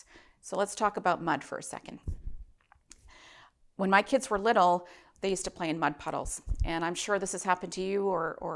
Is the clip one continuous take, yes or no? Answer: yes